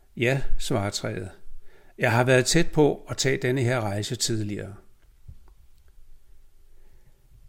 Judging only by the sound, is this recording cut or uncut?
uncut